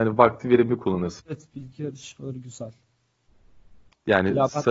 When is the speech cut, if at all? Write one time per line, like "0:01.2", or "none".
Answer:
0:01.2